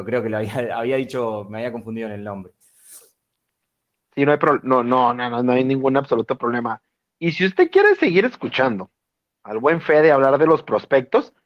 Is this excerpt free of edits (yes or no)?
yes